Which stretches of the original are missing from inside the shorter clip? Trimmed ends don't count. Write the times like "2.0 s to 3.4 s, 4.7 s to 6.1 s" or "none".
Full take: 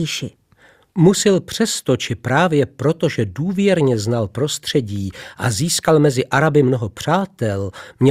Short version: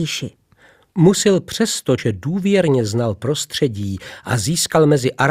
2.0 s to 3.1 s

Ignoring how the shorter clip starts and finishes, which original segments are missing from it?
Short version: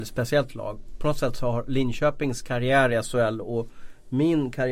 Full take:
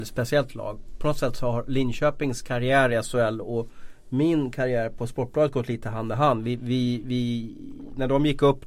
none

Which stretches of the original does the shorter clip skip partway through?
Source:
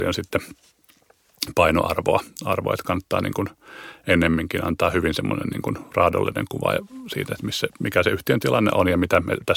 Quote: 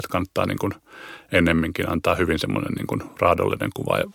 none

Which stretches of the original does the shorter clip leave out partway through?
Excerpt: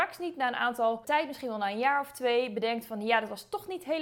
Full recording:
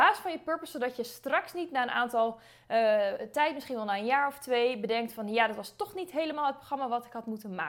2.4 s to 3.3 s

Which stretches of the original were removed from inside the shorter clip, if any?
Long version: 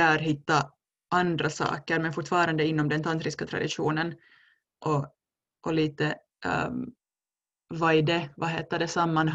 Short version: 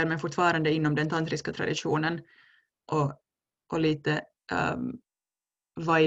none

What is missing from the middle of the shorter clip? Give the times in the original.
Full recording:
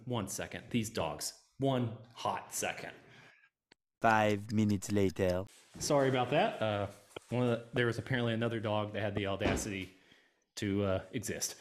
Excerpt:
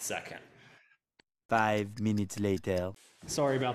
none

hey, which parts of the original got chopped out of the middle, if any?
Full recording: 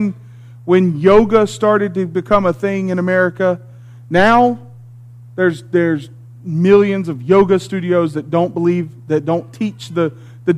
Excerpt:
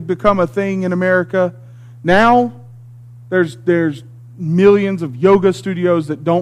none

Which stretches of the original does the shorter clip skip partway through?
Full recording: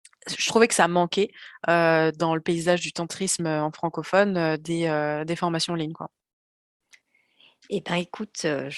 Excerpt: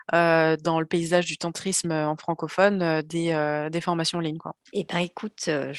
6.2 s to 7.6 s

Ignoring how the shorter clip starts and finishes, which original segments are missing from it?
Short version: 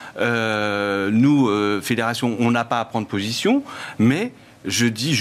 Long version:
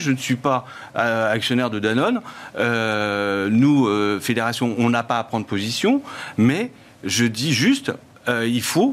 none

